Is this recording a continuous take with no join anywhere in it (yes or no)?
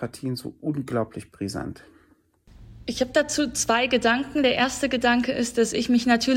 yes